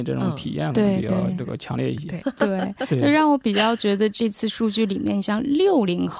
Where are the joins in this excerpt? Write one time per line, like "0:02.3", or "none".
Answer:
0:02.2